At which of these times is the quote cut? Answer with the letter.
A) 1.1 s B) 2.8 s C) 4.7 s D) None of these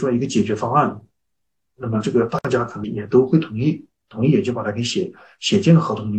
B